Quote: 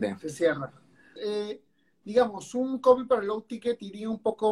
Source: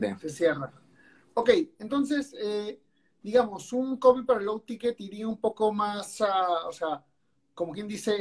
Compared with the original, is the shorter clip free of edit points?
no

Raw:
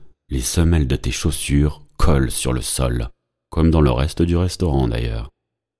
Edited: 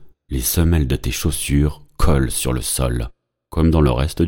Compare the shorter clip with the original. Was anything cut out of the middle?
no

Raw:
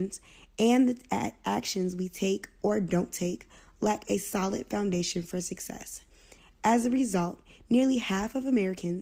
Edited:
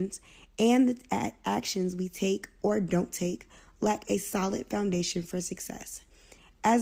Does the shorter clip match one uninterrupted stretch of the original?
yes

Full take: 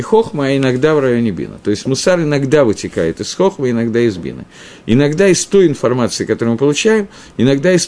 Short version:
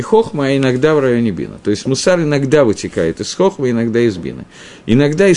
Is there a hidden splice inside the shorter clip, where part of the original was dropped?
no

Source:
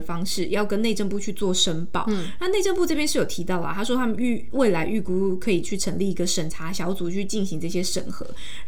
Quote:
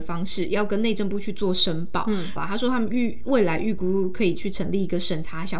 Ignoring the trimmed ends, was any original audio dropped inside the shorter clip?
yes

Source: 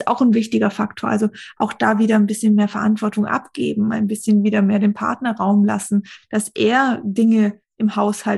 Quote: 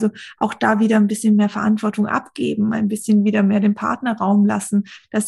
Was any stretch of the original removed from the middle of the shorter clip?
no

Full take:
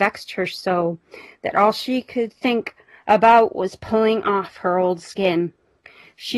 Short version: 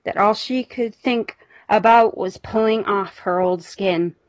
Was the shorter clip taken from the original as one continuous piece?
yes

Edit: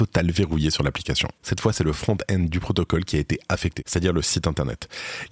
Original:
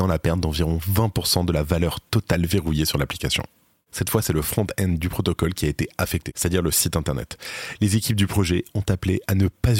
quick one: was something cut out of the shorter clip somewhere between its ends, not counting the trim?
yes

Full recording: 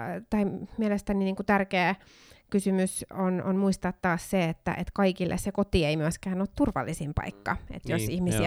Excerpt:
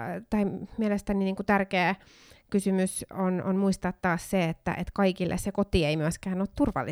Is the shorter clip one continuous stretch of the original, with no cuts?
yes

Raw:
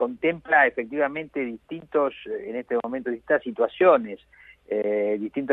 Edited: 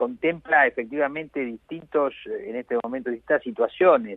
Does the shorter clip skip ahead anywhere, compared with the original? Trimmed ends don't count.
no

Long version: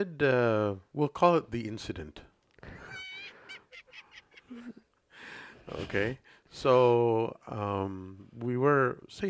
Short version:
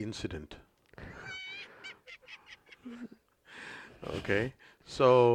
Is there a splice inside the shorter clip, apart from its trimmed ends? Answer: no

